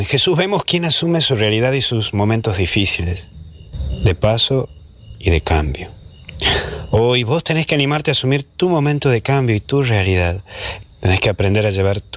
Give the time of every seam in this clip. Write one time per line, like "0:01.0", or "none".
0:10.8